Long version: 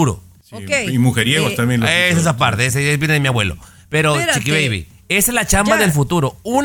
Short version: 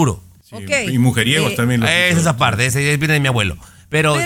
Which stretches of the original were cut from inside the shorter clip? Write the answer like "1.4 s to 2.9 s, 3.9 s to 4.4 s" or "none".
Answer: none